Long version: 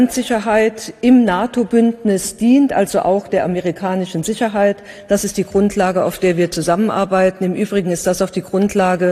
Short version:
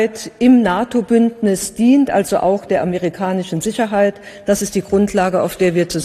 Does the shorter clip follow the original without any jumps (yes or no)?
yes